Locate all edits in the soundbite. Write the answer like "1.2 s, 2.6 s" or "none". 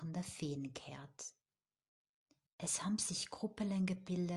2.5 s